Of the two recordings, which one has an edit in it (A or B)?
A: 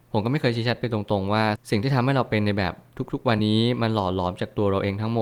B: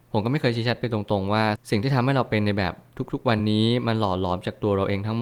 A